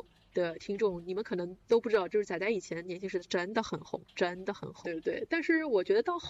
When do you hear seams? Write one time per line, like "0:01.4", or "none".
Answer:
0:03.3
0:04.8

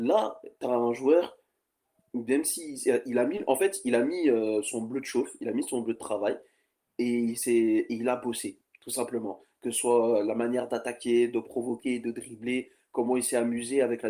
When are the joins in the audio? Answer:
none

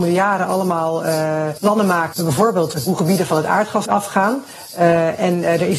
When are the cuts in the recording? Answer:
none

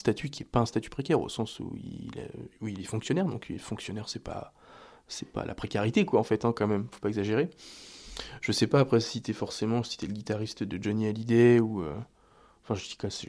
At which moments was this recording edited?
none

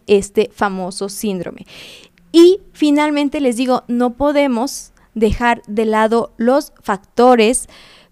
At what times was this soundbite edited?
none

